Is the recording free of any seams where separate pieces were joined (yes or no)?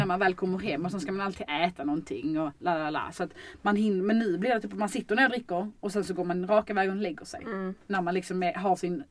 yes